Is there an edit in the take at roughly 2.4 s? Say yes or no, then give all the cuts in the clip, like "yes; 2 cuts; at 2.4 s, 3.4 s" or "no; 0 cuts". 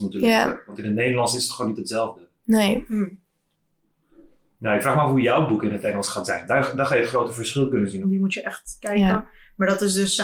no; 1 cut; at 8.0 s